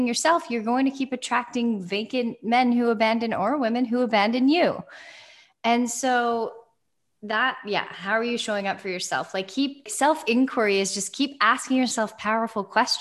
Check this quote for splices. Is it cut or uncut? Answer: cut